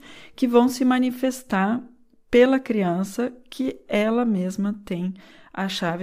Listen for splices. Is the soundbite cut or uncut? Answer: uncut